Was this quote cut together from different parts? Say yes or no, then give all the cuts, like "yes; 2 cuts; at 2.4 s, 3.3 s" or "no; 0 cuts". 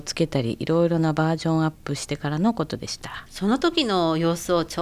yes; 1 cut; at 3.3 s